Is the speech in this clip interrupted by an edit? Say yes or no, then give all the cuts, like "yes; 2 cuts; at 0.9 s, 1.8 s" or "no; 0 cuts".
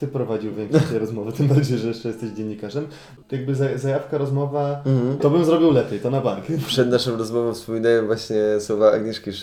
yes; 2 cuts; at 3.2 s, 5.2 s